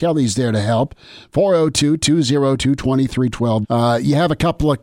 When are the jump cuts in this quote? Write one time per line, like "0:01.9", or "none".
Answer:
0:03.6